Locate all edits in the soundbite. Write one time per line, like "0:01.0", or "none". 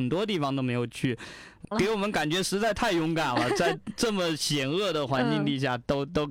0:01.7